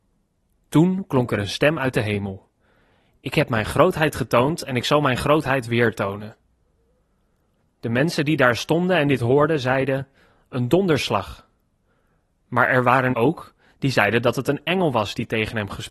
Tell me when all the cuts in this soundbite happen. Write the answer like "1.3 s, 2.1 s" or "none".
13.1 s